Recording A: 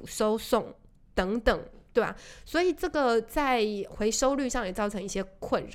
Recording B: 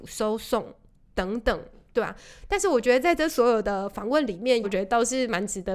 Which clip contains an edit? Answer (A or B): B